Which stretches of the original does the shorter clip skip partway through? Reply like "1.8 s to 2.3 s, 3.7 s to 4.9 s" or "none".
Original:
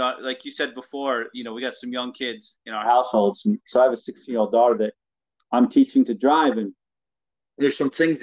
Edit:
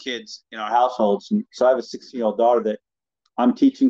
none